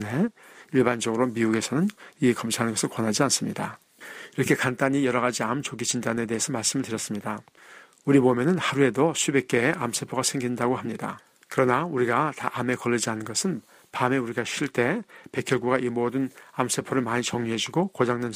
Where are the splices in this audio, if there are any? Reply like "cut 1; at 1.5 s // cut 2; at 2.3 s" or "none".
none